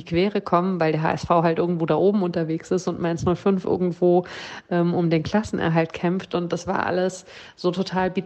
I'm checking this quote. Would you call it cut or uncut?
uncut